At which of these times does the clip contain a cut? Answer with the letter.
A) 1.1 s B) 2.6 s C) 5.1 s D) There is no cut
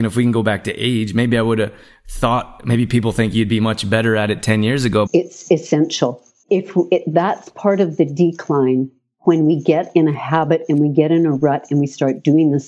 C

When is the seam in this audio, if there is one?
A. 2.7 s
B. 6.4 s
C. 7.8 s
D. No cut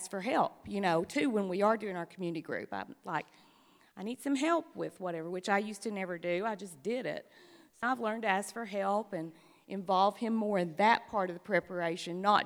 C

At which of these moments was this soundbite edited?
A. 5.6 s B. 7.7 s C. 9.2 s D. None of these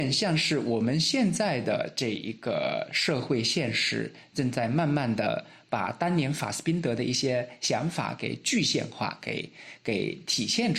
D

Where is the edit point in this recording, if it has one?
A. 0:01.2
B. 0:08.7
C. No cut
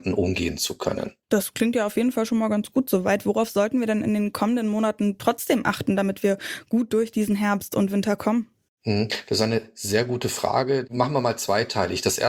A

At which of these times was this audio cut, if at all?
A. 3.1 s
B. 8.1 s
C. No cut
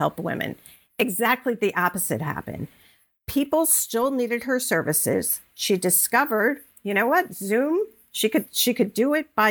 C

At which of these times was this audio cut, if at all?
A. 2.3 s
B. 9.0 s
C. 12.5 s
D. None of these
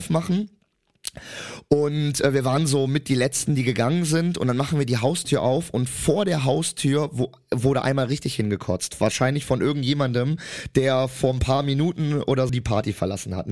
C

